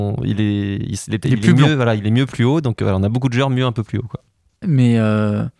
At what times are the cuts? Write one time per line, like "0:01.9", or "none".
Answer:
0:04.6